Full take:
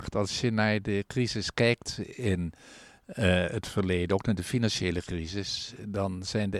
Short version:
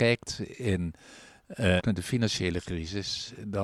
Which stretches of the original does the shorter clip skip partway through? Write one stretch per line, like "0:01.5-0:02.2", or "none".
0:03.4-0:04.2